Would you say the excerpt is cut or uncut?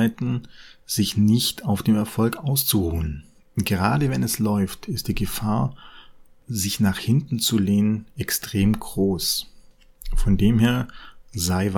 uncut